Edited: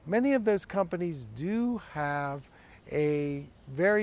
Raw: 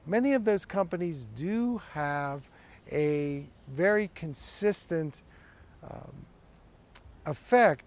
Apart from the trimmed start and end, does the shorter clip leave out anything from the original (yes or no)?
no